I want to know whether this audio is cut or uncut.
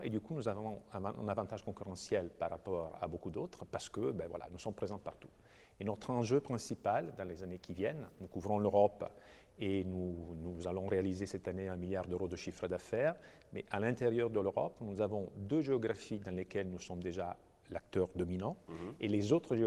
uncut